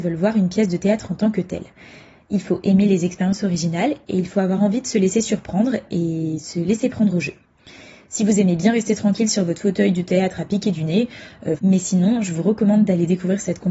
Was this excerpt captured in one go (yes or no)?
no